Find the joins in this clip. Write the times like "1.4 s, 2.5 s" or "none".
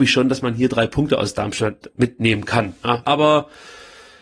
3.0 s